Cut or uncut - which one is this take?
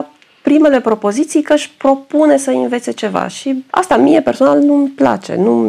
cut